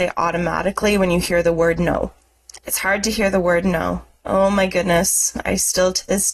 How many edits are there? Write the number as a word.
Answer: one